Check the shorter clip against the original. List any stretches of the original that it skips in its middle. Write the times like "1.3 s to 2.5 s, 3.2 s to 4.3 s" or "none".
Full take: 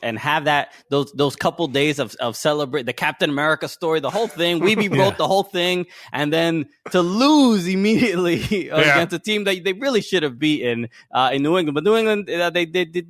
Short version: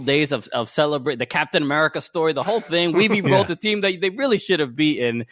5.1 s to 9.1 s